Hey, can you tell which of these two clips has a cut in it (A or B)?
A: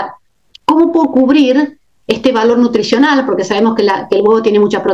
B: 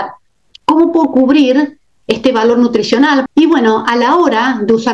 B